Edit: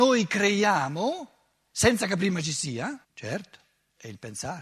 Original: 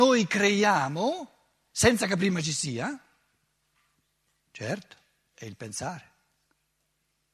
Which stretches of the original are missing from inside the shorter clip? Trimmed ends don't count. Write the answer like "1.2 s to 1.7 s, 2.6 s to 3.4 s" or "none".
3.0 s to 4.4 s